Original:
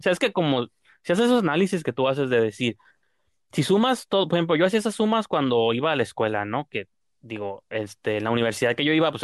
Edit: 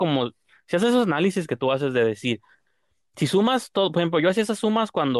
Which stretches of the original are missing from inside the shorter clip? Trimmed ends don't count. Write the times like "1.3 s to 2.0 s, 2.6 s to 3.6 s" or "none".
none